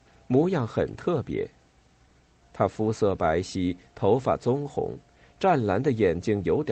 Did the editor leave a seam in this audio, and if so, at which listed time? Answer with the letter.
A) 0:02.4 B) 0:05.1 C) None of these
A